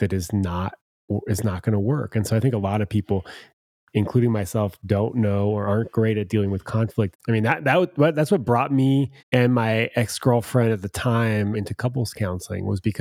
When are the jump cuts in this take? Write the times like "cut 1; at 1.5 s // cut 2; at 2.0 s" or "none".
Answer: cut 1; at 7.1 s // cut 2; at 9.2 s // cut 3; at 11.5 s